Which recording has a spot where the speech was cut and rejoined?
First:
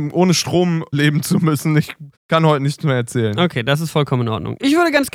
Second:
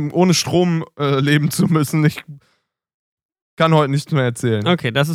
first; 2 cuts; at 0.9 s, 2.2 s

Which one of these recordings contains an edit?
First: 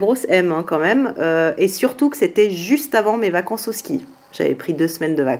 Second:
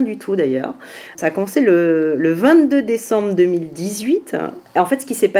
second; 1 cut; at 1.1 s

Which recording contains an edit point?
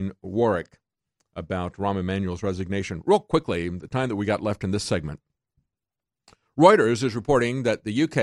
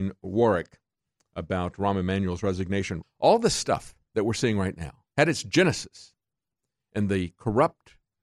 second; 2 cuts; at 3.0 s, 5.1 s

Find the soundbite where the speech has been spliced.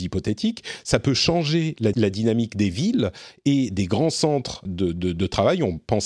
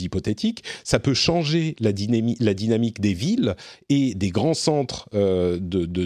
first; 2 cuts; at 1.9 s, 4.7 s

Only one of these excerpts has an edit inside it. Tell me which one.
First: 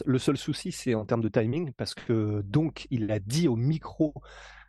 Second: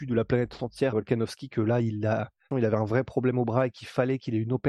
second; 2 cuts; at 0.9 s, 2.5 s

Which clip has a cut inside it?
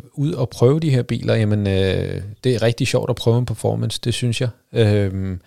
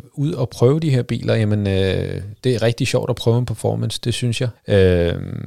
second; 1 cut; at 4.5 s

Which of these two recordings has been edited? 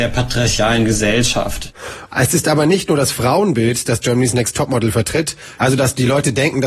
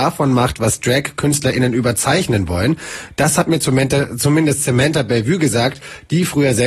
first; 2 cuts; at 2.1 s, 5.6 s

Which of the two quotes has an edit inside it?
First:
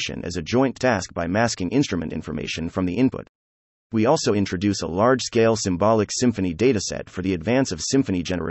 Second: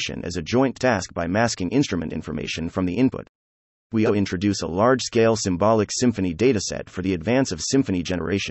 second; 1 cut; at 4.1 s

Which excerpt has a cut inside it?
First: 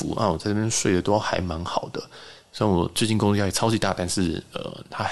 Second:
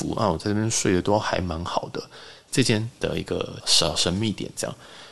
second; 2 cuts; at 2.5 s, 3.6 s

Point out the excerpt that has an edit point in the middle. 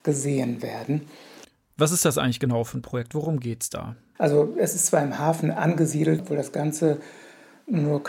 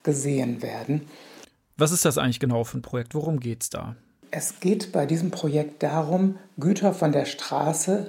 first; 2 cuts; at 4.2 s, 6.2 s

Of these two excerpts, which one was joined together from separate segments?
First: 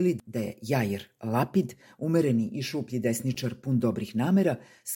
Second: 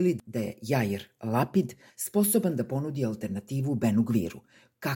second; 1 cut; at 1.9 s

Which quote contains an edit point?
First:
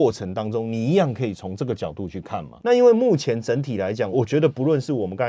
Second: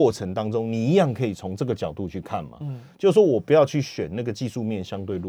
first; 2 cuts; at 2.6 s, 4.1 s

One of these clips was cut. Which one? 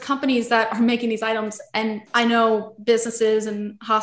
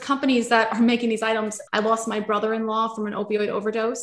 second; 1 cut; at 1.7 s

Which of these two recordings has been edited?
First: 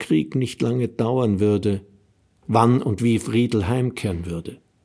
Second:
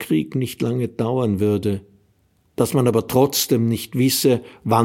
first; 1 cut; at 2.4 s

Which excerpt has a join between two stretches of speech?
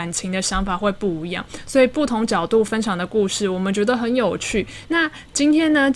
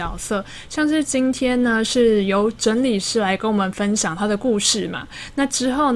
first; 1 cut; at 4.8 s

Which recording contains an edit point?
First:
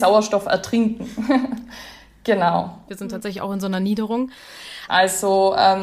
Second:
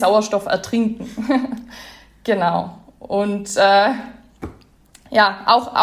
first; 2 cuts; at 2.9 s, 4.9 s

